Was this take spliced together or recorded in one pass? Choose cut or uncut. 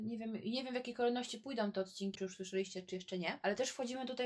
cut